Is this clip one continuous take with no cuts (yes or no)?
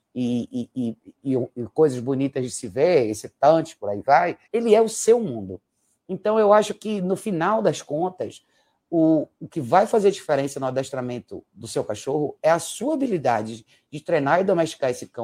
no